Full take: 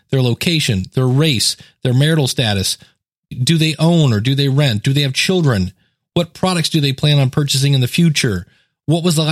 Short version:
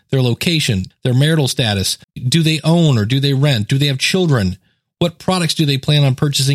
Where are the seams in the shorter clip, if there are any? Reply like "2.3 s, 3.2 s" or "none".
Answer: 0.9 s, 2.0 s

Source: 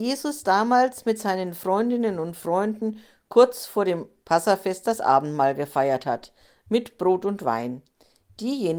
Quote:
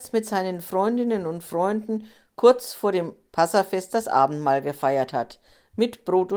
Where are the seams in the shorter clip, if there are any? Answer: none

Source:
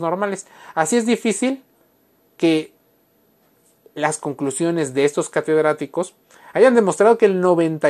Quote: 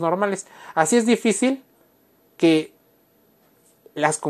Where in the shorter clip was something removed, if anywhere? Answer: none

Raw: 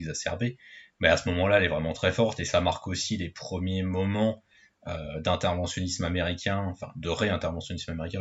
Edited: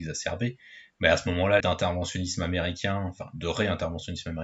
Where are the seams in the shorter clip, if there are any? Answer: 1.6 s

